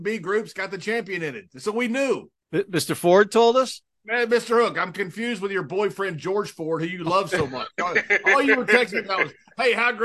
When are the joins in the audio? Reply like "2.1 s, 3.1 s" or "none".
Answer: none